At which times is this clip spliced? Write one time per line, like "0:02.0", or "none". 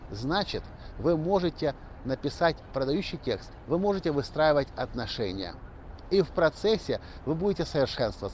0:03.6
0:06.0

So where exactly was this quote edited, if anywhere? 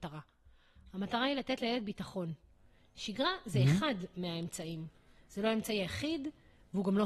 none

